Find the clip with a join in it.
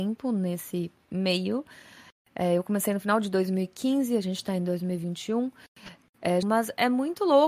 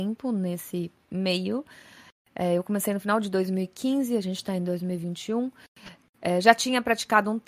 first; 1 cut; at 6.4 s

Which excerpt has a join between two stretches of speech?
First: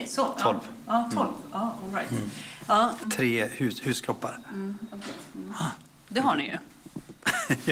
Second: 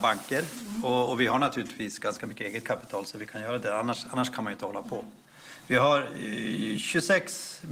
first; 1 cut; at 3.0 s

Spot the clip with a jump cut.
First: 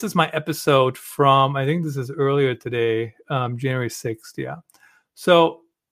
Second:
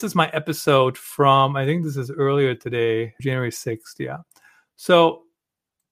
second; 1 cut; at 3.2 s

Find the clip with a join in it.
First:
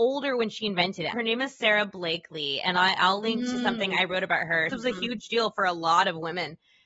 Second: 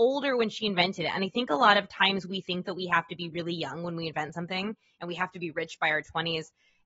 first; 2 cuts; at 1.1 s, 4.7 s

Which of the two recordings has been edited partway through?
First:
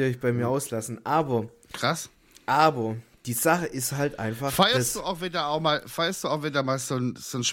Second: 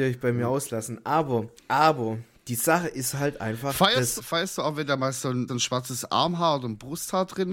second; 3 cuts; at 1.6 s, 4.2 s, 5.5 s

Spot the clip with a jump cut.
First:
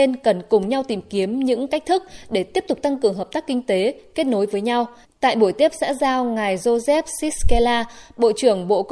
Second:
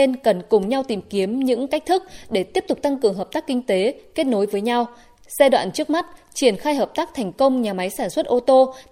first; 1 cut; at 5.0 s

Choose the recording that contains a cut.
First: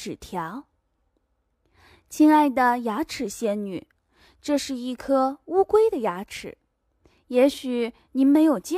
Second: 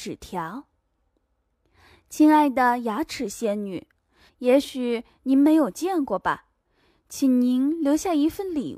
second; 1 cut; at 4.3 s

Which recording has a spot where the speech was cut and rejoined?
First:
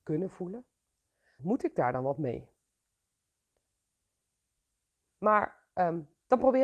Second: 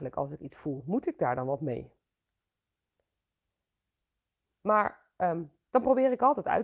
first; 1 cut; at 1.4 s

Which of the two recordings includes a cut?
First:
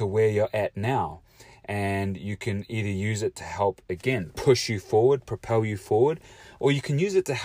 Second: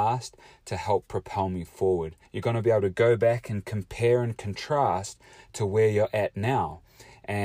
second; 1 cut; at 2.2 s

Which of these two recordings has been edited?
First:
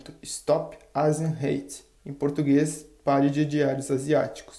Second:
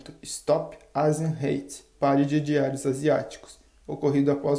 second; 1 cut; at 1.9 s

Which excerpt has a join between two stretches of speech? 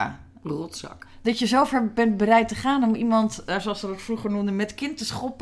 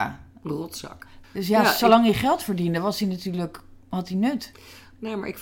second; 2 cuts; at 1.2 s, 3.8 s

